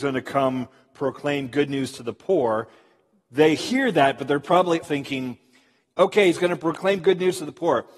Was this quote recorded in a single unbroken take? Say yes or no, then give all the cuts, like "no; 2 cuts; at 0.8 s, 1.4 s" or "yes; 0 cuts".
no; 1 cut; at 4.8 s